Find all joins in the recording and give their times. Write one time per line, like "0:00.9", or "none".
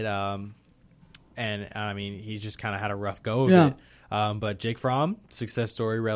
none